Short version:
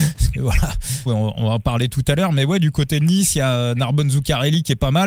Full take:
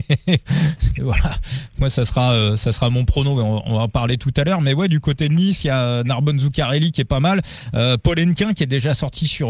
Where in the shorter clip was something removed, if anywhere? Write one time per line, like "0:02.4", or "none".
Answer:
0:01.1

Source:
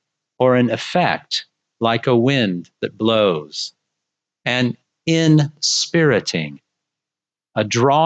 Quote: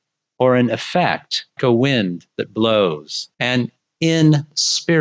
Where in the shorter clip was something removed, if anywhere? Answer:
0:01.6
0:03.3

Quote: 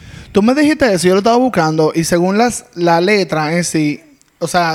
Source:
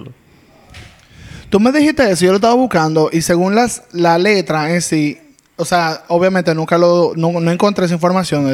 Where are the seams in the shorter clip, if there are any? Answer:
none

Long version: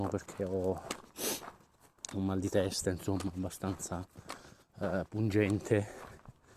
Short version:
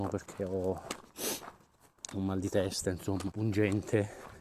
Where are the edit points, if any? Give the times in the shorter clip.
0:03.3

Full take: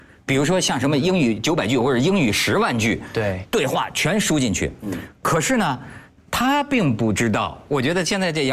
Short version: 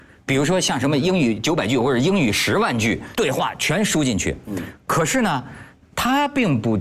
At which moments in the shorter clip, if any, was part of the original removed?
0:03.1

